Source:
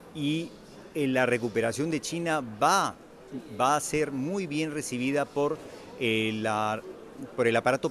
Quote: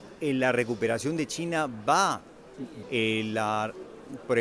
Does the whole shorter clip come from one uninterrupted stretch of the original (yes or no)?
no